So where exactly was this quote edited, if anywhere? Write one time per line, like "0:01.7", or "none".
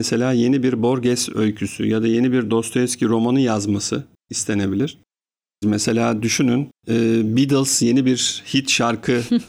0:05.6
0:06.8